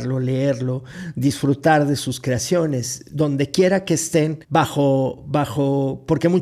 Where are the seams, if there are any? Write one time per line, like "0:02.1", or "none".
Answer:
0:04.4